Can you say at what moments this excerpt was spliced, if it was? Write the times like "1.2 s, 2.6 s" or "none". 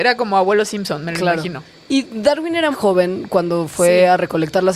2.7 s